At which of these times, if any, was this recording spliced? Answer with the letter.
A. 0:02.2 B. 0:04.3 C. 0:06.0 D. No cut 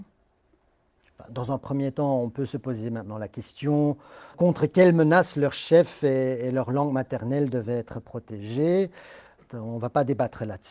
B